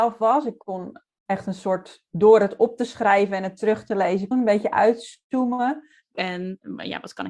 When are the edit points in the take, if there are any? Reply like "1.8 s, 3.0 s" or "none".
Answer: 4.3 s, 6.1 s